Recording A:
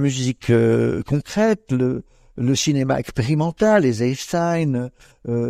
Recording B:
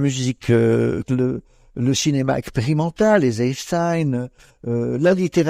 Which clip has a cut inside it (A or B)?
B